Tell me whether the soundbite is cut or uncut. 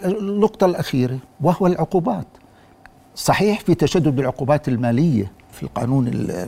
cut